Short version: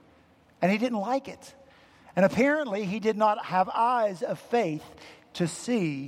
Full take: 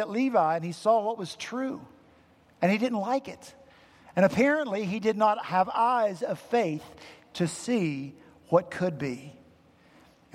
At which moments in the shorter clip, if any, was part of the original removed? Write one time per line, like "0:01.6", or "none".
none